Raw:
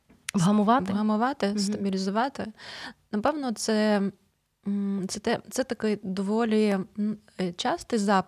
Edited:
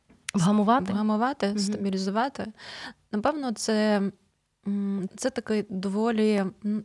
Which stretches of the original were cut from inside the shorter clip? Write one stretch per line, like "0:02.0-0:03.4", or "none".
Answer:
0:05.1-0:05.4